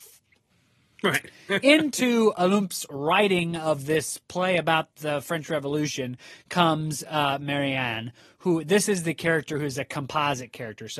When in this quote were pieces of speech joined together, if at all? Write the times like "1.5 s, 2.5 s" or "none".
none